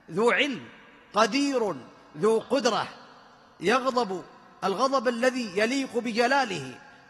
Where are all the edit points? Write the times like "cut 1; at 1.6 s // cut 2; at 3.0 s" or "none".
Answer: cut 1; at 2.4 s